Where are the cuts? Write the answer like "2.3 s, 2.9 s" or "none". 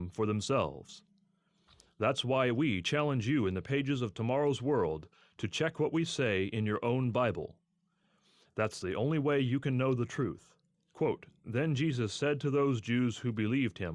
10.7 s